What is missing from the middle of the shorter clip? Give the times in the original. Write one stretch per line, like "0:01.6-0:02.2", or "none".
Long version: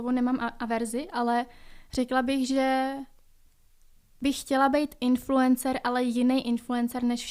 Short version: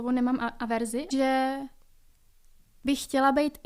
0:01.1-0:02.5